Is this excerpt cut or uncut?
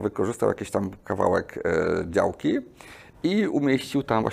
uncut